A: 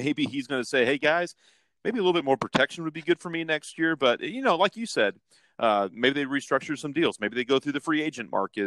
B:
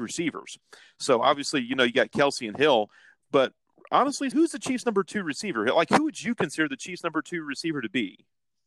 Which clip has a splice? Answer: B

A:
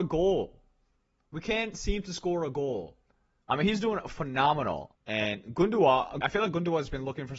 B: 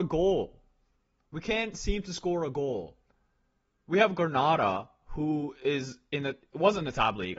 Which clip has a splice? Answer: A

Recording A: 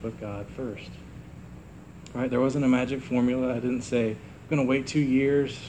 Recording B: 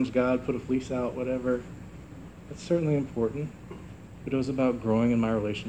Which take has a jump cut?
B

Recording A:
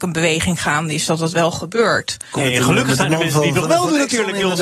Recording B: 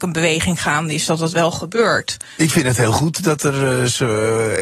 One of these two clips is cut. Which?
A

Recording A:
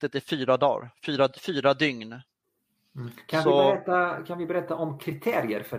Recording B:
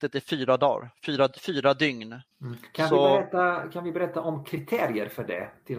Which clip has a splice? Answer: B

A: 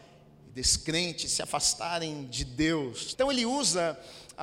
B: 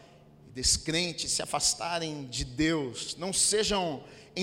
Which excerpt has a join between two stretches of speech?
A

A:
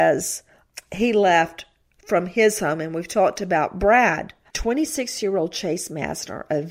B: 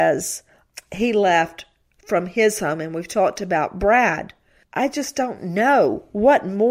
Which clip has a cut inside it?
A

